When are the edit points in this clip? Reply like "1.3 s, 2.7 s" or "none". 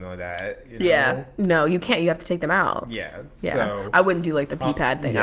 1.3 s